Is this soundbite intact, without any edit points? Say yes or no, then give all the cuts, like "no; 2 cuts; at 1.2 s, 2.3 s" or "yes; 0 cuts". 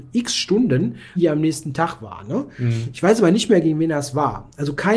no; 1 cut; at 1.2 s